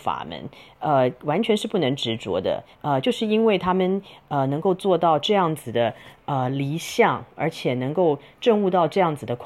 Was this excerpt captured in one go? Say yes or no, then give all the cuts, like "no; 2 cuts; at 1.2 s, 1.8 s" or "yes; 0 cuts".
no; 1 cut; at 2.7 s